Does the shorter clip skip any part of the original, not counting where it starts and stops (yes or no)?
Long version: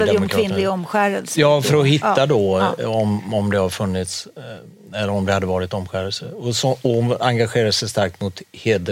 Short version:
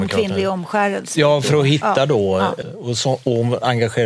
yes